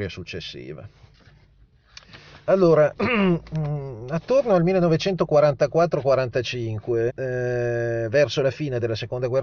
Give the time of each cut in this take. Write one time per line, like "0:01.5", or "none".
0:03.0
0:07.1